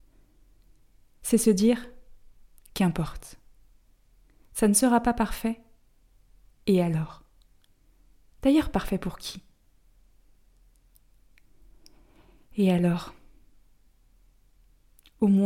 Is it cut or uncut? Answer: uncut